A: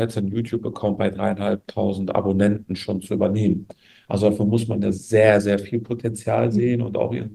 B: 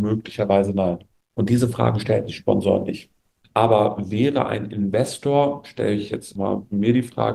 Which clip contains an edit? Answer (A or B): B